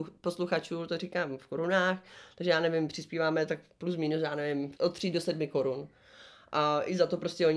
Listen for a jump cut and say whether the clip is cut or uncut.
cut